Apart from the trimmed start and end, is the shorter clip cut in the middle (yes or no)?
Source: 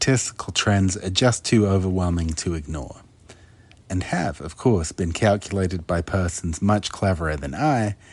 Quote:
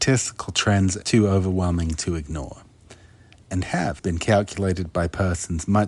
yes